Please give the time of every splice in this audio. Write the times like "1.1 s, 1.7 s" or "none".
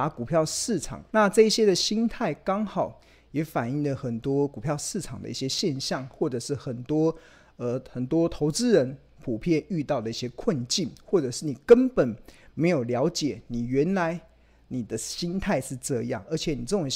1.1 s